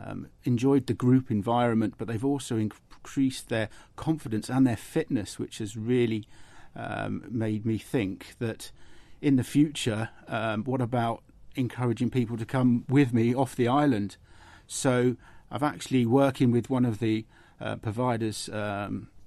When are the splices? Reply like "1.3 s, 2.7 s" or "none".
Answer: none